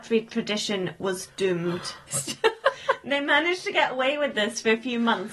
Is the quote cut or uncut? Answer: cut